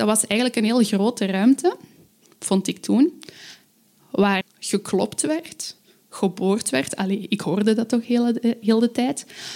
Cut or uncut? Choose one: cut